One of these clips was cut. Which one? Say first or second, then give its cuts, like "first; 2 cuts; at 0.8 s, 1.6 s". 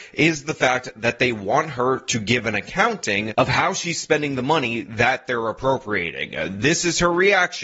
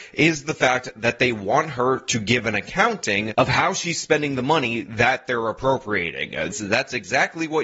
second; 1 cut; at 6.5 s